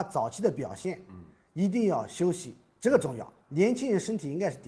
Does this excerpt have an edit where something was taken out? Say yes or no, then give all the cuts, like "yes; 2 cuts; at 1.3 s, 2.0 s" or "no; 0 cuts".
yes; 1 cut; at 3.5 s